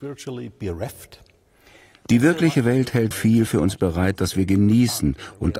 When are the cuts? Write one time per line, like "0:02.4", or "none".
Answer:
0:03.1